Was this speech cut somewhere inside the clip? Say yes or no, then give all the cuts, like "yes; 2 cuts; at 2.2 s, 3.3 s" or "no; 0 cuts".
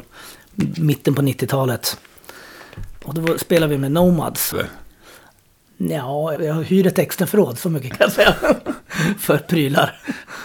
yes; 2 cuts; at 4.5 s, 6.4 s